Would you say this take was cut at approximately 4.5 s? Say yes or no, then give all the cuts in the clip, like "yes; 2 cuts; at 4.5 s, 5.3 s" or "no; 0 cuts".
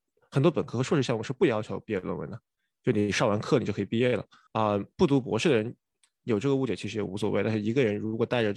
yes; 1 cut; at 4.5 s